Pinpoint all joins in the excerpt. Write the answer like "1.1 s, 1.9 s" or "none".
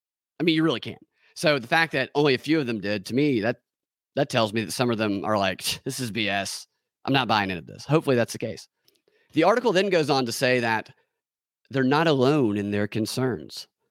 none